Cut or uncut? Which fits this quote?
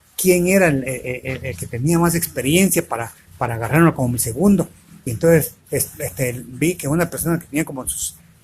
uncut